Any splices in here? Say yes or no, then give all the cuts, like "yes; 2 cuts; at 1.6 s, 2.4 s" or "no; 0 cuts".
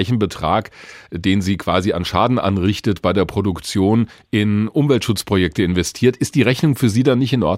no; 0 cuts